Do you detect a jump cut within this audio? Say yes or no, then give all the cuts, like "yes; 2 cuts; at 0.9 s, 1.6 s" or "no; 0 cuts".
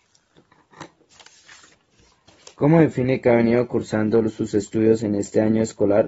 no; 0 cuts